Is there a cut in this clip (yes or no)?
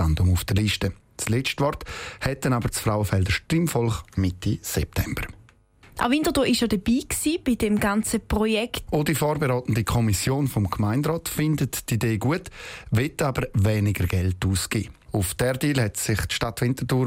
yes